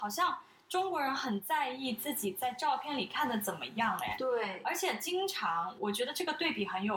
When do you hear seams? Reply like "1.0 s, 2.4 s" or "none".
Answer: 5.8 s